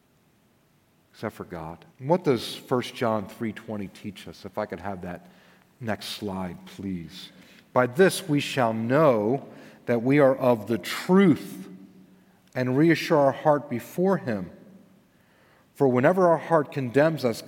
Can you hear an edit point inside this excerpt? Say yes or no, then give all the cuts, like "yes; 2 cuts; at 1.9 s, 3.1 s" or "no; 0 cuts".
yes; 1 cut; at 1.9 s